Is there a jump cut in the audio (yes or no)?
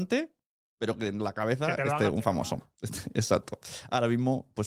no